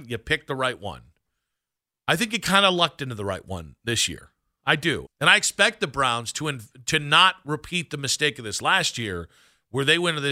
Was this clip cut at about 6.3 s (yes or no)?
no